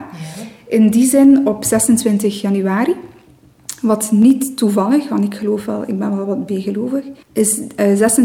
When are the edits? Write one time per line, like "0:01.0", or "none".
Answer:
0:07.2